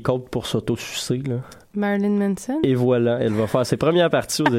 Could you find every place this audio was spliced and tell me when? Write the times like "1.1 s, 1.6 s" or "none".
none